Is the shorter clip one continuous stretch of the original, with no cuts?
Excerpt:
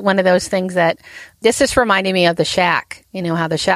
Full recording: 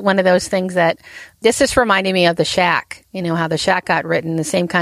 yes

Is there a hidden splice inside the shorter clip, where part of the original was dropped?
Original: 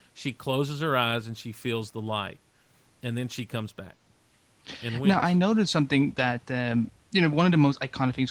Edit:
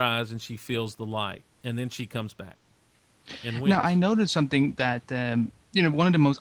yes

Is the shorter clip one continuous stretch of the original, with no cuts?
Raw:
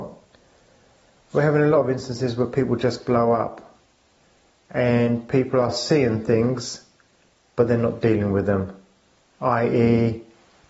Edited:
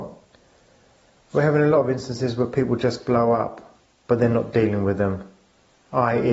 no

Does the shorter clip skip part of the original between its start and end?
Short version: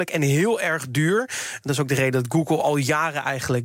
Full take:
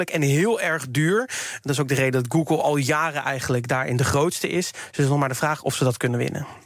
no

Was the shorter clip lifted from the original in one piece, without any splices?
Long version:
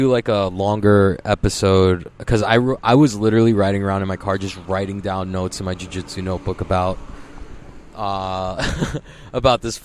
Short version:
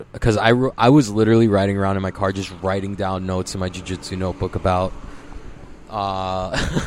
yes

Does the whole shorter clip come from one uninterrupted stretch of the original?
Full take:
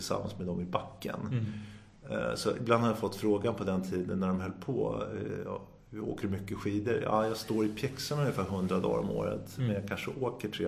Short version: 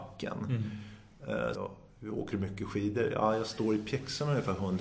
no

